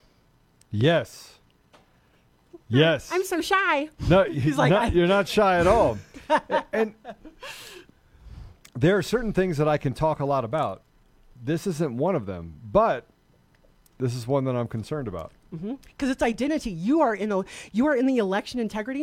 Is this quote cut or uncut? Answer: uncut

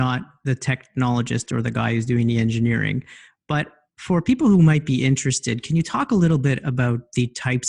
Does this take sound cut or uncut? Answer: uncut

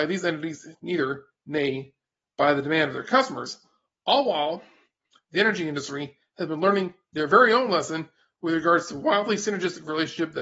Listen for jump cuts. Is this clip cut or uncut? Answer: uncut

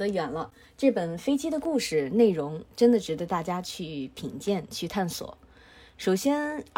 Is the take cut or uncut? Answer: uncut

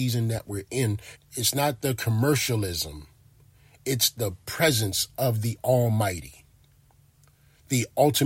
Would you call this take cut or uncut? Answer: cut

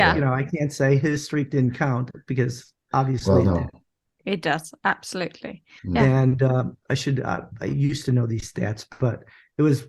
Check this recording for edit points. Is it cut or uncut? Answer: cut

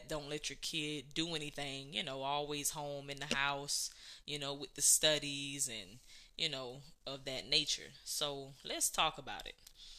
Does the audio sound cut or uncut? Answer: uncut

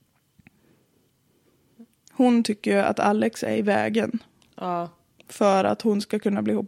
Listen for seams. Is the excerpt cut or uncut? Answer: uncut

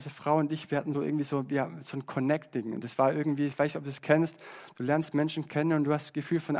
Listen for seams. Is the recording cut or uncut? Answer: cut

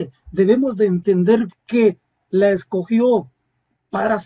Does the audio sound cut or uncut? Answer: cut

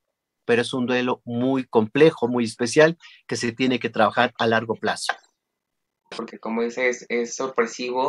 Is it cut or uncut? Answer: cut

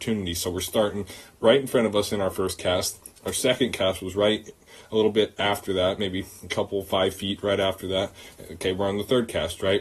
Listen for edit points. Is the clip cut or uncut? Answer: uncut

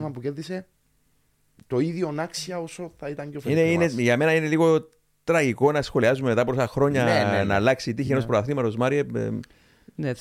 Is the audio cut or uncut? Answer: uncut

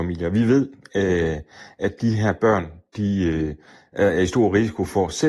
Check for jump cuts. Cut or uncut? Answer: uncut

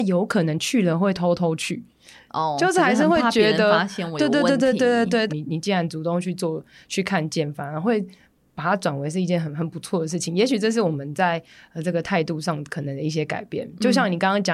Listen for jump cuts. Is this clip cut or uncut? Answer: cut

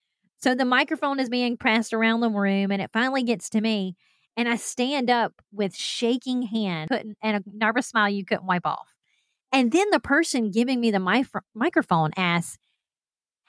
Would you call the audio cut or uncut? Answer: uncut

